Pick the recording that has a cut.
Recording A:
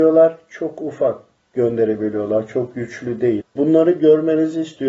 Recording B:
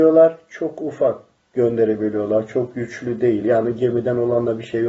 A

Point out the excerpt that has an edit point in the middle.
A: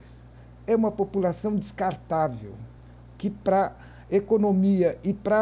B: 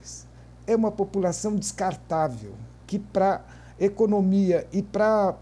B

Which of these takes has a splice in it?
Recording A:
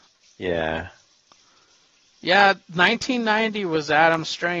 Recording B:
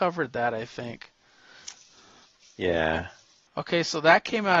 B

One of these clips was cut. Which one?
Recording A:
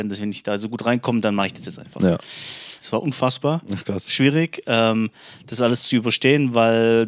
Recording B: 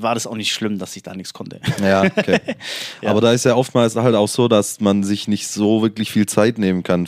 A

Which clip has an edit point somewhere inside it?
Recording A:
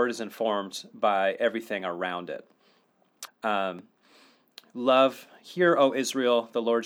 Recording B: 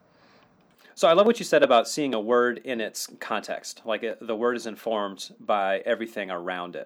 A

